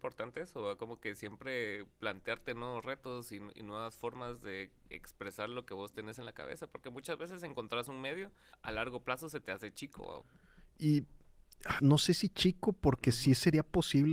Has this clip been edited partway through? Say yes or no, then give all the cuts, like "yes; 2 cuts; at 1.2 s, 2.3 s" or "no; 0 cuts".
yes; 2 cuts; at 8.5 s, 11.8 s